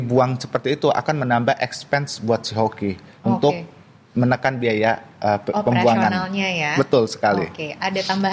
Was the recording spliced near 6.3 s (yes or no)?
no